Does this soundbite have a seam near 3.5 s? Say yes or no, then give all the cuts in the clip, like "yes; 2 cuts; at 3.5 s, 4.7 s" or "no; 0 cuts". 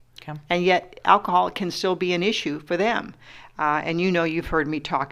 no; 0 cuts